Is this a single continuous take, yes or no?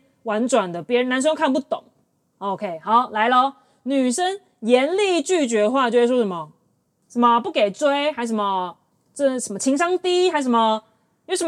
yes